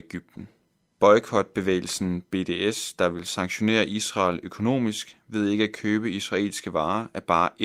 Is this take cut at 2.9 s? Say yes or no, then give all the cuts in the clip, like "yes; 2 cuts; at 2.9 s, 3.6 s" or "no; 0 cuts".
no; 1 cut; at 0.9 s